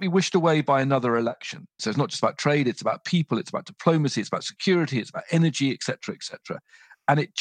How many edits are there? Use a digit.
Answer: 1